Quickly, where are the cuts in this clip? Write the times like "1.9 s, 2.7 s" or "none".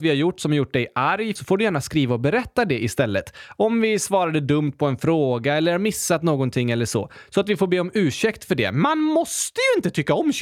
1.4 s